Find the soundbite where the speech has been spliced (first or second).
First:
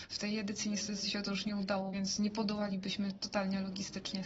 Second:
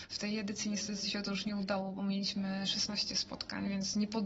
first